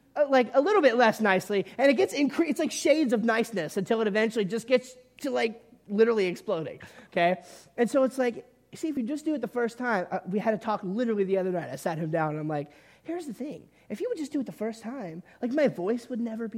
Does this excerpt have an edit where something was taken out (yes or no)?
no